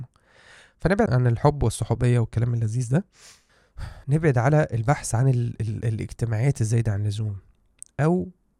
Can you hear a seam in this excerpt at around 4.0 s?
yes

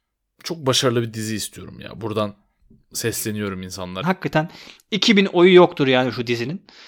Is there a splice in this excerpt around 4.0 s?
yes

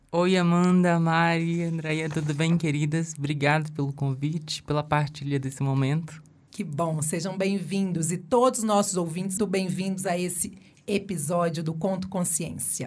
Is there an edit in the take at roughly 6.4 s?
no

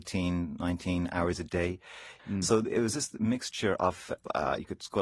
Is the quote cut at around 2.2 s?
yes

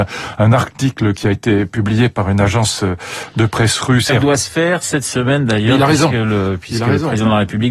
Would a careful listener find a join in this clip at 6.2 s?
no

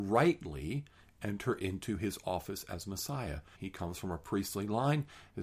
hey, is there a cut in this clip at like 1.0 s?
no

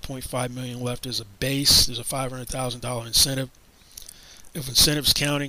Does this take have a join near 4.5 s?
yes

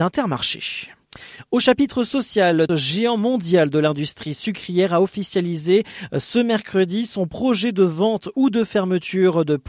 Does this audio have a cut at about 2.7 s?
yes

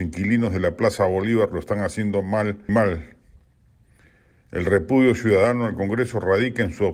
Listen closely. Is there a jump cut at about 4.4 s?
no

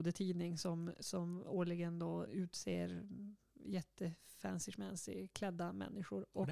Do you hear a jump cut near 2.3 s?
yes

